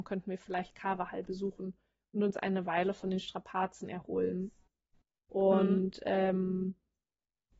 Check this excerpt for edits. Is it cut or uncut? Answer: cut